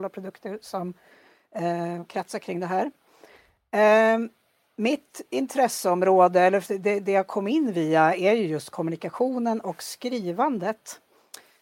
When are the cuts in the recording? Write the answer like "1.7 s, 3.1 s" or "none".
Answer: none